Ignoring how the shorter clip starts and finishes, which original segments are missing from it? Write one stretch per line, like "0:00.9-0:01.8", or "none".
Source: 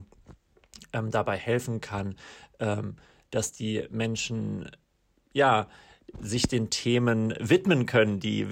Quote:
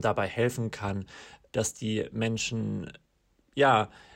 0:02.6-0:03.3